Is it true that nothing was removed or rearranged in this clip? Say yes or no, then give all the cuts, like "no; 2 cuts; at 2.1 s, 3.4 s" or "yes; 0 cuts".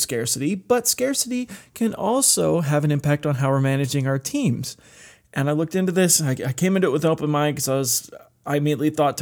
yes; 0 cuts